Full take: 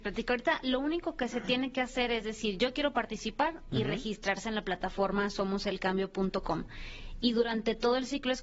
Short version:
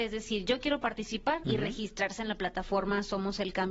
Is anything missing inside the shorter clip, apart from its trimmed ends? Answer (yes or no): yes